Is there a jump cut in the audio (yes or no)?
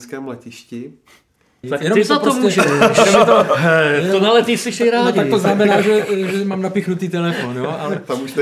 yes